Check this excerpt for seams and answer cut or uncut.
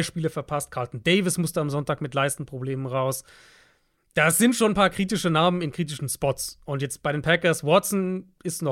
uncut